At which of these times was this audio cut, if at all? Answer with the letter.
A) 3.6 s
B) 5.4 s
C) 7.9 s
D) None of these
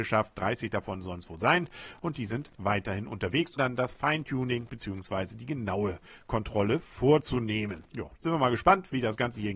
A